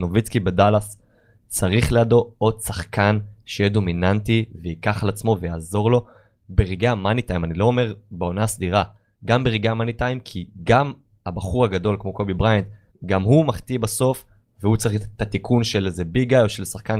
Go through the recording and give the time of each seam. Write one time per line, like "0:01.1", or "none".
0:12.9